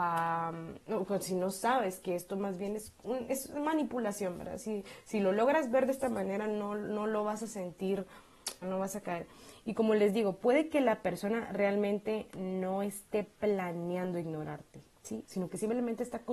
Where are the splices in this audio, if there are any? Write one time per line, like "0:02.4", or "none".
0:08.6
0:15.2